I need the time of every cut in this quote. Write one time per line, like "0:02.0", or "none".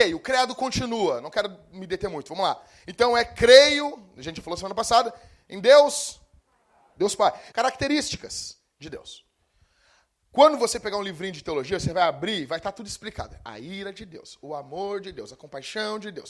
0:07.5